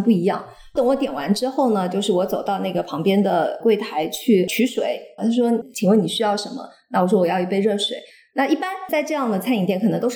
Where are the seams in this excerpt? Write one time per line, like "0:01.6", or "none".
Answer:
0:05.2